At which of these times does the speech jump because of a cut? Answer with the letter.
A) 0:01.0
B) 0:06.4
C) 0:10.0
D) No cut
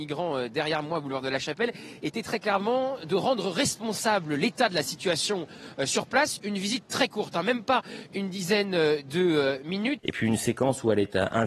C